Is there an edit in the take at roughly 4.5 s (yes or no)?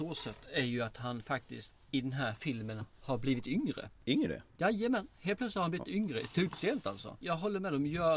no